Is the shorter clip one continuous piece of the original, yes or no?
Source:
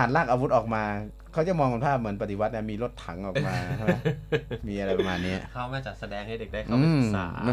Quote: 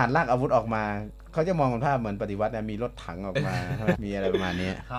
no